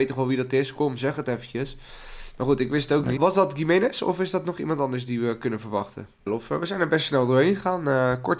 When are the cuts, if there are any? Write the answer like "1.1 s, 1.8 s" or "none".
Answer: 3.2 s, 6.3 s